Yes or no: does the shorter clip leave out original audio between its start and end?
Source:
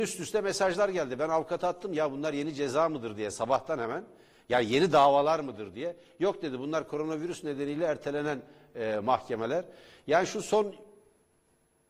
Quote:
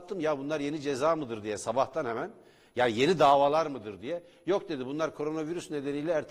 no